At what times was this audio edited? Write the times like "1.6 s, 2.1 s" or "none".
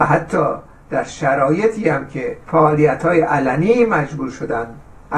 2.4 s